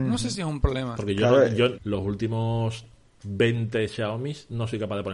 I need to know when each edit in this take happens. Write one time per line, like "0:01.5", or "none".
0:01.8

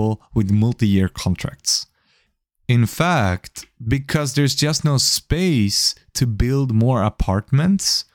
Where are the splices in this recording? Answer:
none

